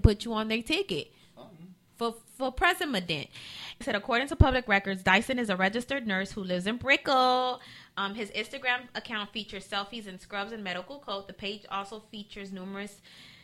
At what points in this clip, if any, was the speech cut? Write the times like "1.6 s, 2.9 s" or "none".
3.8 s